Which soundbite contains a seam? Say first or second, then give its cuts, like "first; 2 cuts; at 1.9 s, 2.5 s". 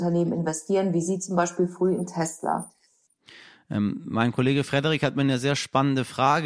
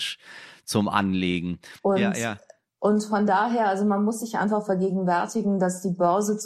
second; 1 cut; at 1.8 s